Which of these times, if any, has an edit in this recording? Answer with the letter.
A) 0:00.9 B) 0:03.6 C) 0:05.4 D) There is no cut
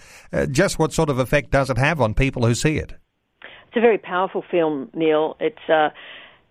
D